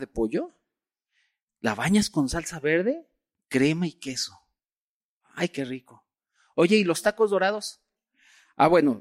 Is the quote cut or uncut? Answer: uncut